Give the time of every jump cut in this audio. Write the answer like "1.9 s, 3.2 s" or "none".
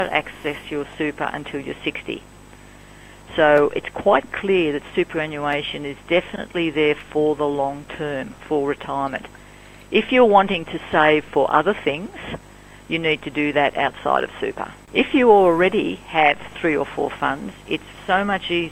8.4 s, 14.8 s